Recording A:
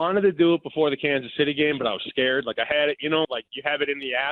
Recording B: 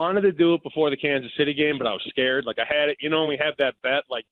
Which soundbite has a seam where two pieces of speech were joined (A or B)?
A